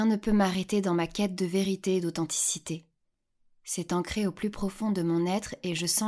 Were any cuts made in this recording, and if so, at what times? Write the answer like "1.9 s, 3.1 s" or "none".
none

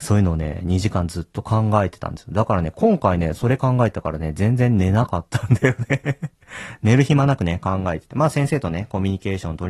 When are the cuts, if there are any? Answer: none

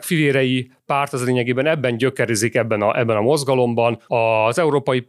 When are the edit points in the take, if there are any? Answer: 4.1 s

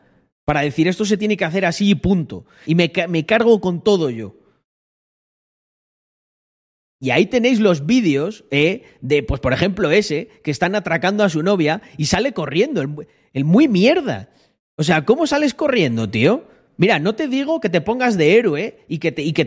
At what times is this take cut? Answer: 2.6 s

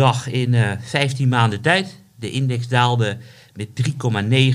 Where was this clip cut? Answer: none

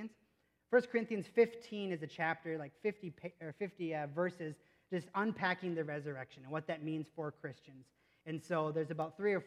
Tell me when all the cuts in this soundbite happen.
none

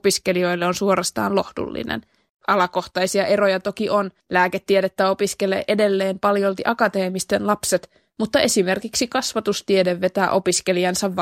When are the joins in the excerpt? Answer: 2.3 s, 4.2 s

